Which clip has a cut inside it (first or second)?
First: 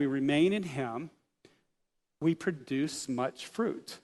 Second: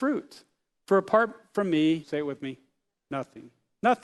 second